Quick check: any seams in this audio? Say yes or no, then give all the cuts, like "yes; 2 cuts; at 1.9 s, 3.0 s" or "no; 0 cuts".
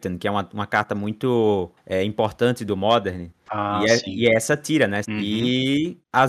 yes; 1 cut; at 5.0 s